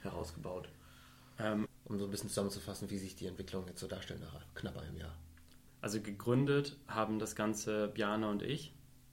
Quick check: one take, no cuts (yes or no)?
no